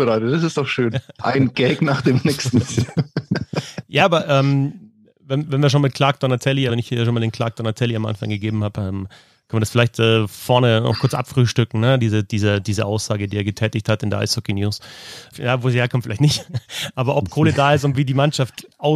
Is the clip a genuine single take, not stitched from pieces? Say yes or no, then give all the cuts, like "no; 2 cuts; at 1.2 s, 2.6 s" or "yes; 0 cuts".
no; 2 cuts; at 6.7 s, 15.3 s